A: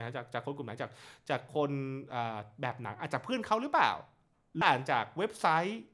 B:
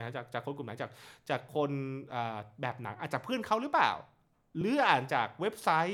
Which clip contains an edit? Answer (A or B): A